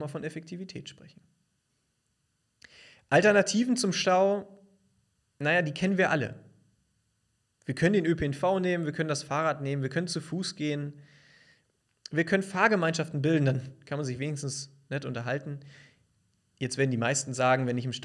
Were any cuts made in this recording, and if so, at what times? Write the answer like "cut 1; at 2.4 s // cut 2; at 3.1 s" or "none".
none